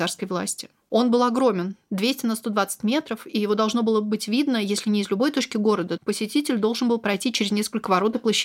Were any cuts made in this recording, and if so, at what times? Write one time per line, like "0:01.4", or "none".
0:06.0